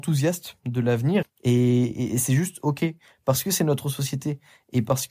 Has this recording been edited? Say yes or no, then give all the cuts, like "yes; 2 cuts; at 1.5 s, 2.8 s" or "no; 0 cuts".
yes; 1 cut; at 1.2 s